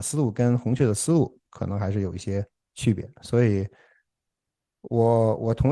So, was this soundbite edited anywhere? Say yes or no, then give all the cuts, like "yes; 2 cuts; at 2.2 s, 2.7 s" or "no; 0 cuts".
no; 0 cuts